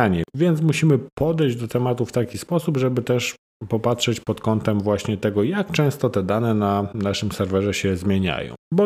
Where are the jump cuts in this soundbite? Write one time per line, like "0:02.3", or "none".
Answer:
none